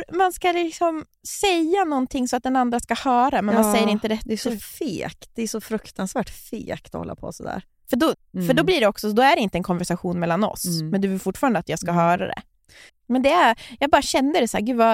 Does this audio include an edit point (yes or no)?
yes